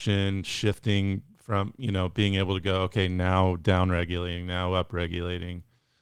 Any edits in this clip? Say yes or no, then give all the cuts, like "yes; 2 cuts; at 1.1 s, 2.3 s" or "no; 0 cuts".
no; 0 cuts